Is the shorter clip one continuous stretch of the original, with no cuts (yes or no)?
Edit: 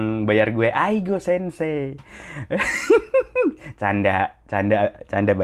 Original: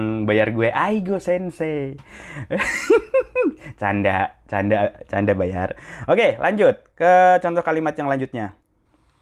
yes